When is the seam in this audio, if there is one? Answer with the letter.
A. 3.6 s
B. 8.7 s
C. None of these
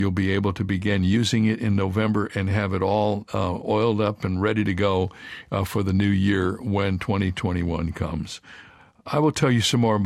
C